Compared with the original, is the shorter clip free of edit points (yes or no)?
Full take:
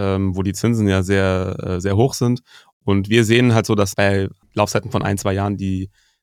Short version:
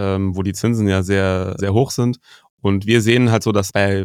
no